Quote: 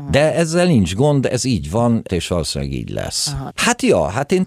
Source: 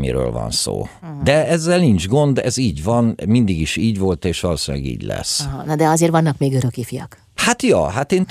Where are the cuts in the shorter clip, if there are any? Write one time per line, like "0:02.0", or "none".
0:02.1
0:03.5